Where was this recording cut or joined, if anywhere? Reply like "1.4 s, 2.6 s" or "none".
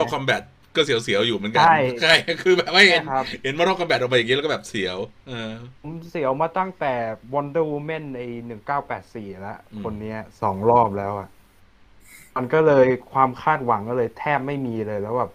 5.7 s